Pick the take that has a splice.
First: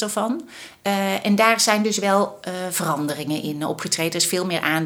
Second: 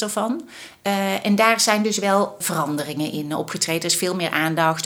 second; 1 cut; at 2.4 s

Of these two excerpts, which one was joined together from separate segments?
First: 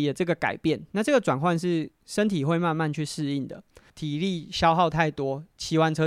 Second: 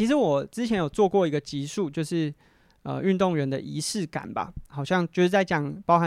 first; 1 cut; at 3.9 s

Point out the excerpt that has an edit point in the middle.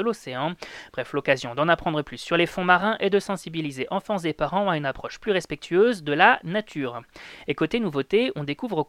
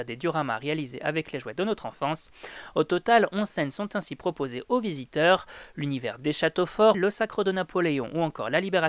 second; 1 cut; at 6.9 s

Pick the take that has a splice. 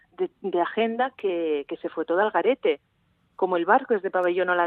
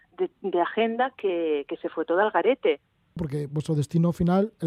second; 1 cut; at 3.2 s

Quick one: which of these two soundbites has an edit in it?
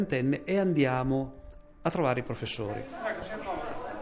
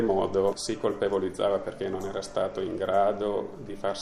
first; 1 cut; at 1.7 s

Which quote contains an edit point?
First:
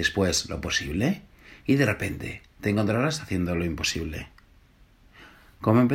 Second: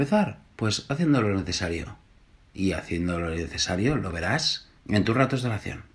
second; 1 cut; at 4.8 s

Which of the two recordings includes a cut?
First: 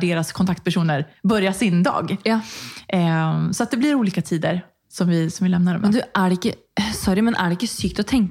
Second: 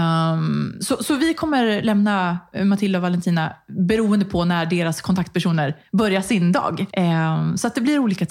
second; 1 cut; at 6.9 s

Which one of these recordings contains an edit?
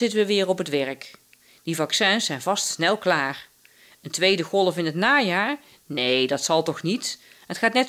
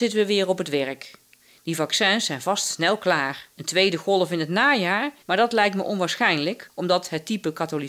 second; 2 cuts; at 3.5 s, 5.2 s

